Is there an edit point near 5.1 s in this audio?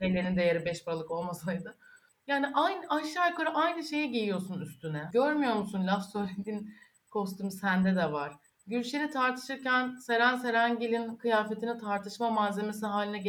yes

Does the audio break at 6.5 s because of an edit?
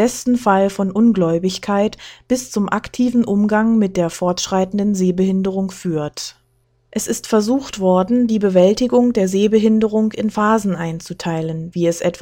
no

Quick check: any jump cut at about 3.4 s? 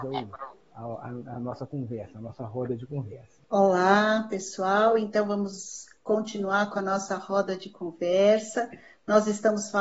yes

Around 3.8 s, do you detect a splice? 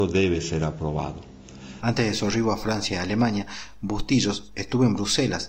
no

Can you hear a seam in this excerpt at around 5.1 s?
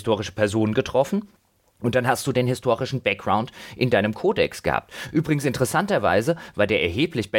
no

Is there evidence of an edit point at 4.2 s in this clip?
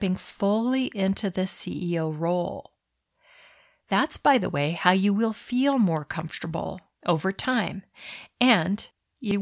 no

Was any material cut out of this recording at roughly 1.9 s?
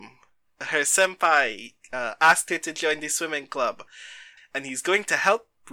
no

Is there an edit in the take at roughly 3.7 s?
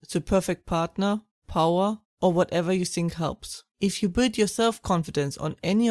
yes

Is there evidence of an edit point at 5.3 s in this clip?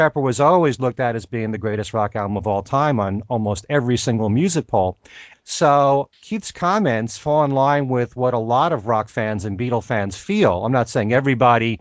yes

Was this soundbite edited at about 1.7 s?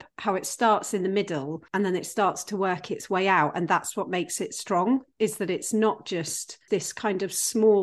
yes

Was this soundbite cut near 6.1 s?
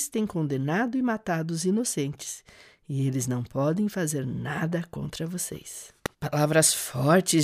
yes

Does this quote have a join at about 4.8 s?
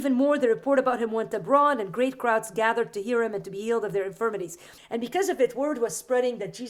yes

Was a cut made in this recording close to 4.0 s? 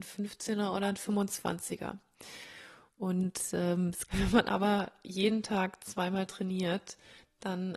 yes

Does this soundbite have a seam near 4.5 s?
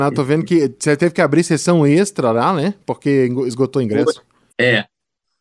yes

